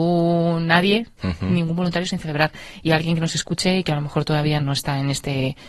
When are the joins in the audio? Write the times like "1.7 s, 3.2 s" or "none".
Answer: 4.6 s